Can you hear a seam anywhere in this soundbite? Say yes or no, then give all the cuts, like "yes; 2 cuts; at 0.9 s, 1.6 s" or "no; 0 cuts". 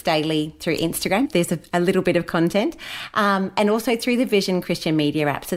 yes; 1 cut; at 1.3 s